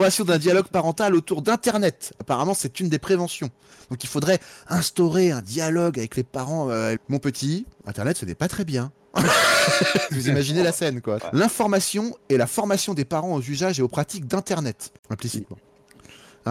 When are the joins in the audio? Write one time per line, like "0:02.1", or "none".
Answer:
0:07.0
0:11.2
0:15.0